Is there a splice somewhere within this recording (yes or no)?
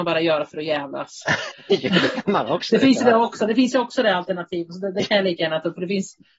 no